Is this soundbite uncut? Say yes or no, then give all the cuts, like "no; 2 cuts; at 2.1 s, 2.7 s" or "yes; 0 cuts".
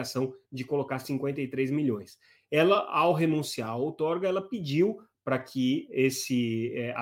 yes; 0 cuts